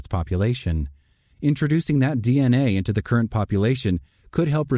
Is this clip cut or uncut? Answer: cut